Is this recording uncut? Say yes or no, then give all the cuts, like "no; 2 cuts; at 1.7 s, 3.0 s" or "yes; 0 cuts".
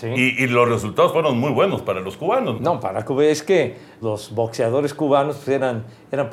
no; 2 cuts; at 2.6 s, 4.0 s